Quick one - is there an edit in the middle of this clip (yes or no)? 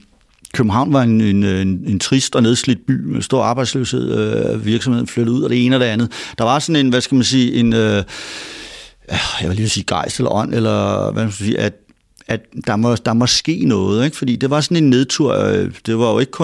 no